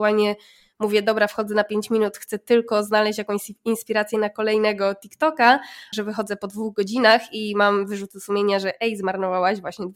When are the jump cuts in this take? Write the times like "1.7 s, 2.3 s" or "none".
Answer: 5.9 s